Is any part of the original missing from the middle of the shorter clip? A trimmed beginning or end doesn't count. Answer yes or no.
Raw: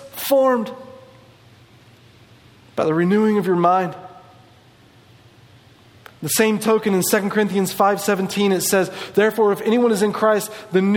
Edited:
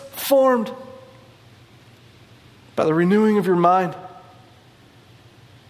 no